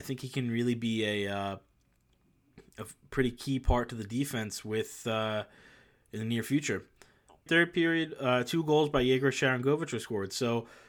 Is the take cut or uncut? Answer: cut